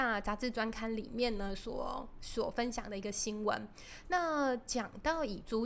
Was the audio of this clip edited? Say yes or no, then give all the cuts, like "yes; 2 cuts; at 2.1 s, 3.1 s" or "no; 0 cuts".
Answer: no; 0 cuts